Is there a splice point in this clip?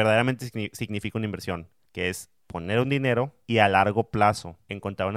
no; 0 cuts

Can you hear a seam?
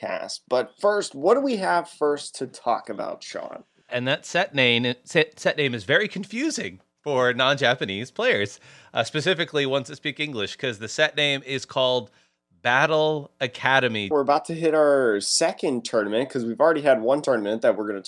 yes; 2 cuts; at 3.9 s, 14.1 s

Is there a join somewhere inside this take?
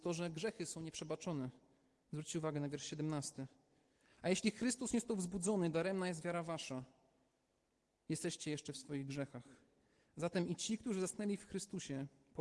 no; 0 cuts

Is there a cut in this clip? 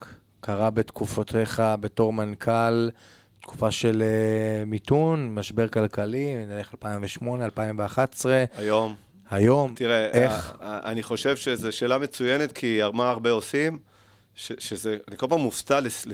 no; 0 cuts

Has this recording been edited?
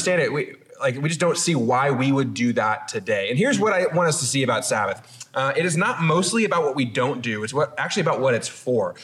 no; 0 cuts

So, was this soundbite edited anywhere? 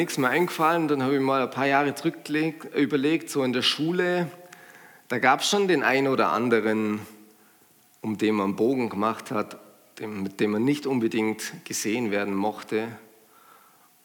no; 0 cuts

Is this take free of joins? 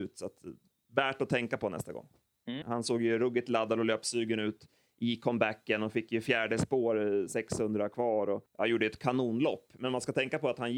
no; 2 cuts; at 2.6 s, 8.5 s

